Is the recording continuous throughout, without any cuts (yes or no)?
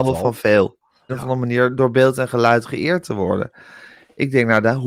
no